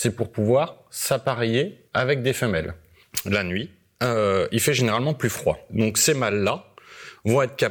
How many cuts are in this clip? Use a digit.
0